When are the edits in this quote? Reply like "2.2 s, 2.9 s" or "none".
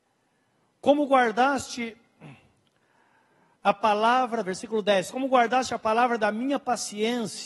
none

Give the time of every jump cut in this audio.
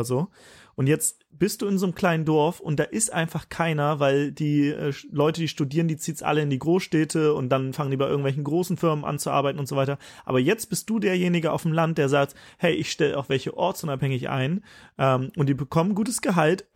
none

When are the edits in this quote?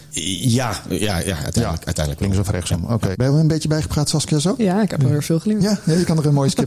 3.1 s

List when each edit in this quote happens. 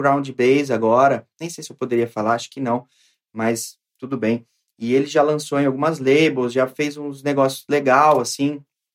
none

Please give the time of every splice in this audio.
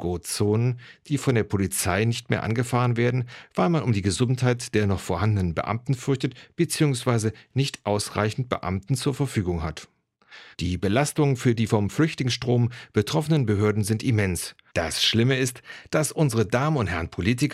10.5 s, 14.7 s

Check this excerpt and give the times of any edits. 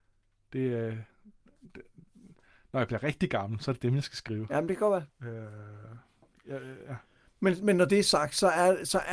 5.1 s, 7.6 s

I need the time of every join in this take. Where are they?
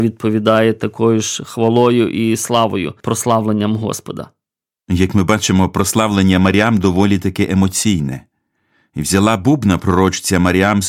none

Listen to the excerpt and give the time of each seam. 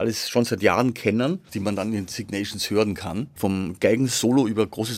1.5 s, 3.4 s

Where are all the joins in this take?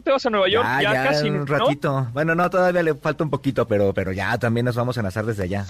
none

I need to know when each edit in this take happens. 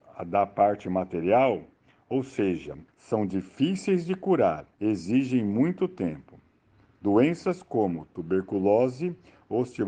2.9 s, 4.7 s

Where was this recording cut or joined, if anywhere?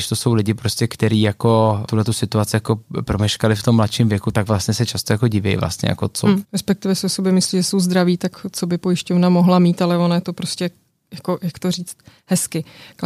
6.4 s

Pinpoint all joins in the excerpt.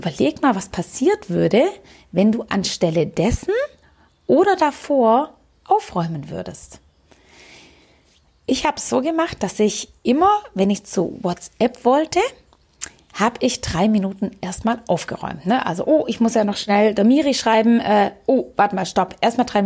none

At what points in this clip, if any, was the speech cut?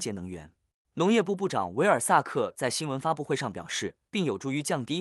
4.1 s

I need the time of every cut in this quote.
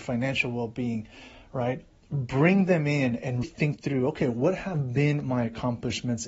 2.0 s, 3.4 s

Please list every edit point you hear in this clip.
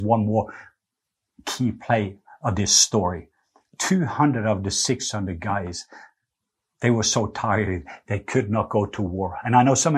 none

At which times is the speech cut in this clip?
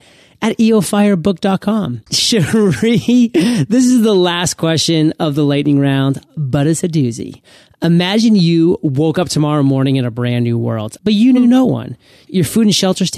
2.1 s, 11.0 s, 12.3 s

